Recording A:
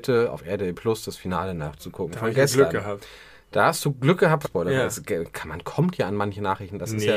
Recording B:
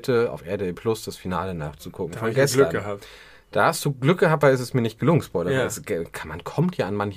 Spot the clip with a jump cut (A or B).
A